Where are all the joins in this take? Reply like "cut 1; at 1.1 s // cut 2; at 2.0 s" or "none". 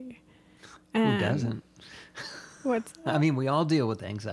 none